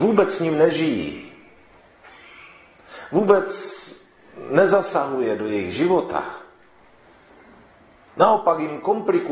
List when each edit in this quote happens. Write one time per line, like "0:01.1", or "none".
none